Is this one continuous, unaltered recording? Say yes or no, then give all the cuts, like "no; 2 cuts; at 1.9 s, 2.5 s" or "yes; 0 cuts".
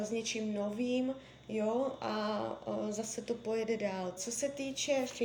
no; 1 cut; at 4.2 s